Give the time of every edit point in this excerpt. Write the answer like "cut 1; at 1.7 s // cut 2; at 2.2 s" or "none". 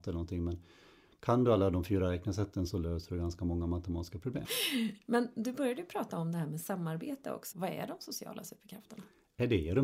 cut 1; at 4.4 s // cut 2; at 7.5 s